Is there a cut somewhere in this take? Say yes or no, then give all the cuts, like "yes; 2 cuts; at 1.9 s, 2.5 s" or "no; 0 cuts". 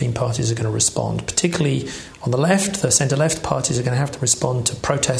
no; 0 cuts